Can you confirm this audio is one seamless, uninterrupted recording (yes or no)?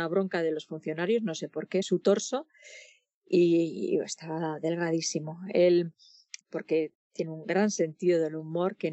no